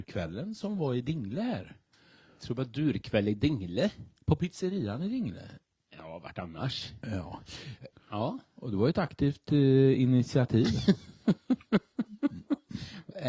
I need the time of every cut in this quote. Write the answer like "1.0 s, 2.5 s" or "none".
7.9 s